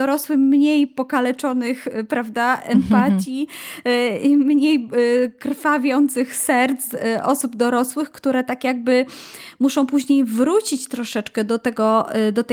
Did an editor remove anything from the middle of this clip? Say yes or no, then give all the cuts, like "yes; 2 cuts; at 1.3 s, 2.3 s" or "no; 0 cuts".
no; 0 cuts